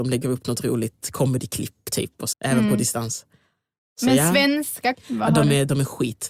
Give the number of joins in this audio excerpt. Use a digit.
2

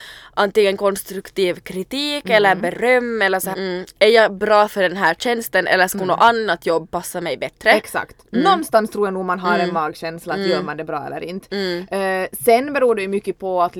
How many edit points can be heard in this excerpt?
1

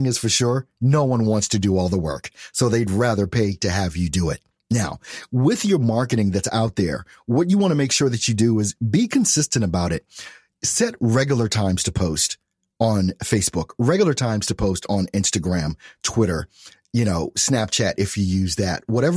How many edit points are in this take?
0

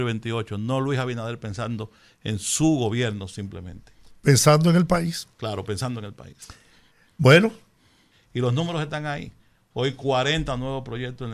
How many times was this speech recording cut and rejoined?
1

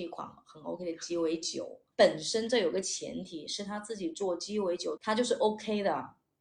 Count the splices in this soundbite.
2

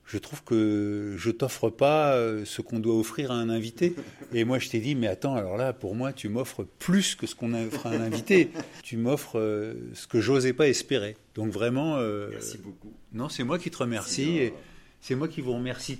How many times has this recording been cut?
0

